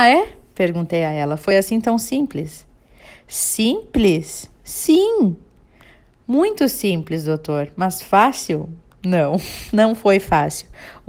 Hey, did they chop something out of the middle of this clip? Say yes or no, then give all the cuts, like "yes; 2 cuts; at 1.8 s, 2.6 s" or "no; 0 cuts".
no; 0 cuts